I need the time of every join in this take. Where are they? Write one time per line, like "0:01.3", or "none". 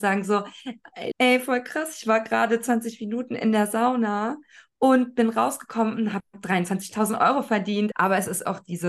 0:01.1
0:07.9

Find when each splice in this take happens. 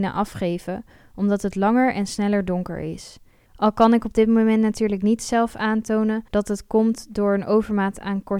0:03.5
0:06.3

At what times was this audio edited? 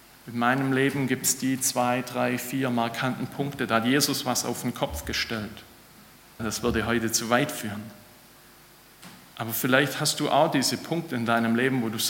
0:06.4

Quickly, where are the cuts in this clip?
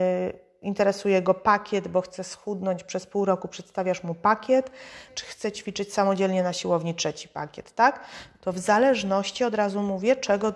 0:05.1
0:08.3

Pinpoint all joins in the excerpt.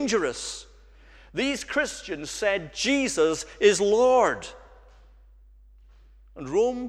none

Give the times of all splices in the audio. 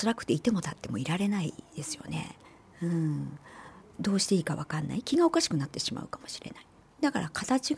0:06.8

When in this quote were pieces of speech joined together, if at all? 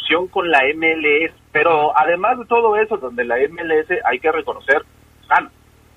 0:01.4
0:03.0

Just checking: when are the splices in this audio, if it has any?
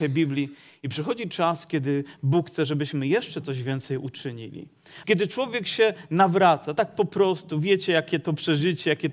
0:05.0

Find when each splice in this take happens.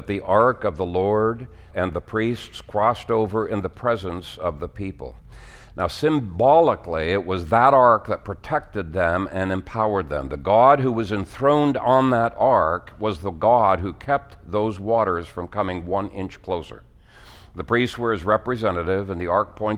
0:01.7

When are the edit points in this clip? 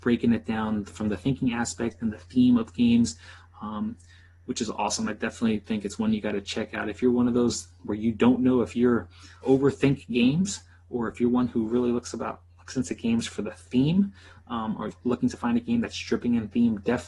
0:09.4
0:14.9

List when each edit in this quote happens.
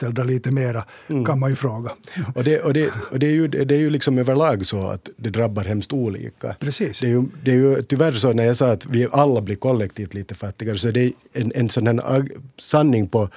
none

